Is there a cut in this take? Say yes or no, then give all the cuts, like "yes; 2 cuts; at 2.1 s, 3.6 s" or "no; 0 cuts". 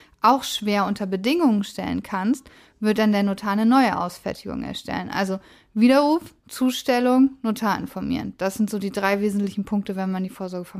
no; 0 cuts